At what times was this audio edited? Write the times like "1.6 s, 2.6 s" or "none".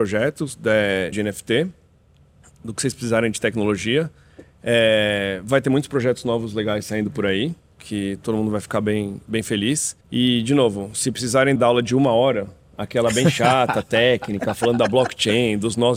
1.1 s, 10.0 s, 11.6 s